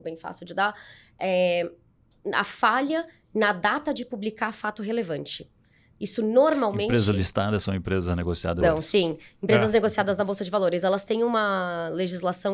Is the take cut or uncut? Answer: cut